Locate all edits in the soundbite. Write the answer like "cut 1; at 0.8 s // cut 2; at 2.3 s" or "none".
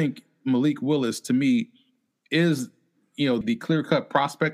cut 1; at 3.4 s